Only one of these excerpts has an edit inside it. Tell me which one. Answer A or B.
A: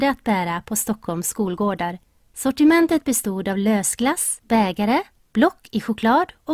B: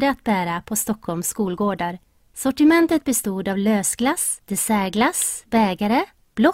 A